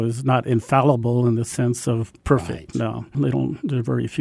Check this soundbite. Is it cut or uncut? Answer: cut